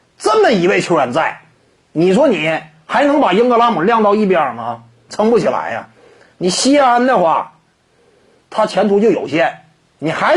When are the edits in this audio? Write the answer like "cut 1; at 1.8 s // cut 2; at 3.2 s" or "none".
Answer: cut 1; at 5.1 s // cut 2; at 8.5 s